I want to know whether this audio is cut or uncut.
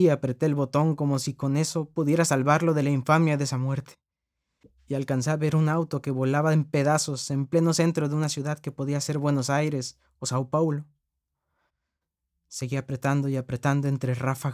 uncut